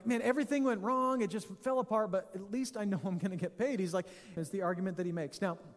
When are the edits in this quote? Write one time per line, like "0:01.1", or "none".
0:04.4

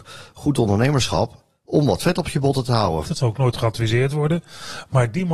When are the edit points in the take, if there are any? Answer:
0:03.0

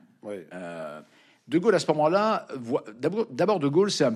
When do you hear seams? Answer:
none

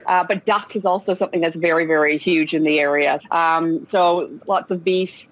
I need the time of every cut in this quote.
0:03.2
0:04.4

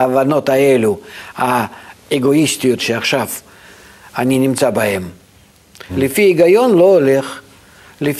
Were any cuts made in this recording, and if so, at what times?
0:02.8
0:05.9

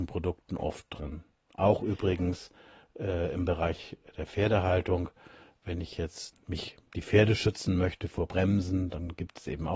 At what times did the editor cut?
none

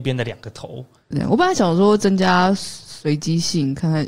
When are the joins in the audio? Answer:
0:01.1

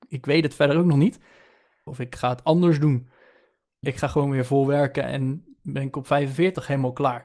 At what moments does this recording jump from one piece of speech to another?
0:01.9
0:03.8

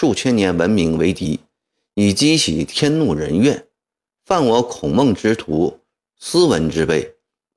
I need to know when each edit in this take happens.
none

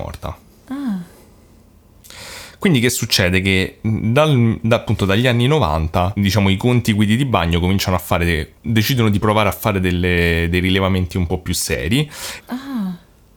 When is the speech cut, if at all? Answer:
0:08.6
0:12.4

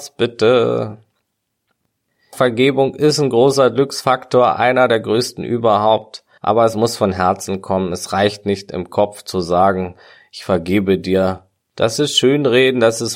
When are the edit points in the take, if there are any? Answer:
none

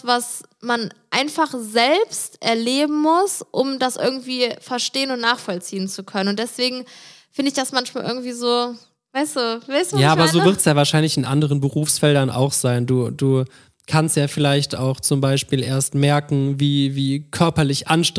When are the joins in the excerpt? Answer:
none

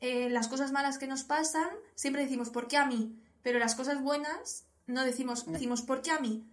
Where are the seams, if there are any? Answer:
0:05.5

